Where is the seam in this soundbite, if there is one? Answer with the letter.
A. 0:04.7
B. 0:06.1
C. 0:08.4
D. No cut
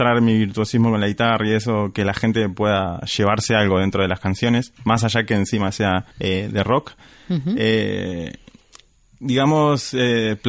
B